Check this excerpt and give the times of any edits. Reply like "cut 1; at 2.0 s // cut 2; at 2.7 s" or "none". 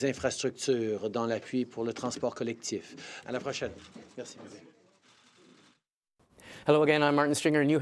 cut 1; at 3.2 s